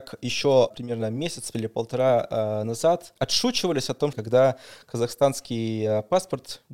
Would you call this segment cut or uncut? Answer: cut